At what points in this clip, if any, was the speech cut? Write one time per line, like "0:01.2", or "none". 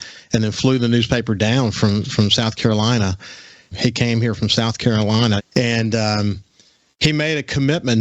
0:03.7
0:05.4